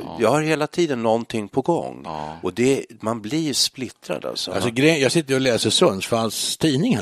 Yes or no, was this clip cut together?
no